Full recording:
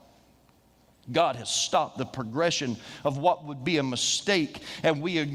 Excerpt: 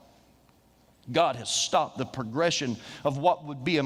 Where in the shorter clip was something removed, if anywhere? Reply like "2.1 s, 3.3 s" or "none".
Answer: none